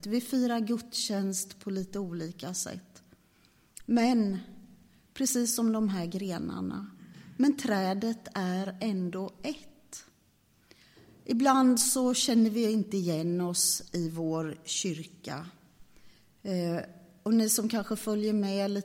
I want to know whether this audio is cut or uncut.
uncut